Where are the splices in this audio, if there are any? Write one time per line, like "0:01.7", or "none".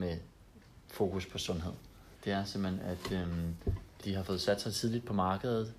0:02.1
0:04.0